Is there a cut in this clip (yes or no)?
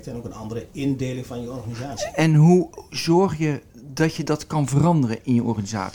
yes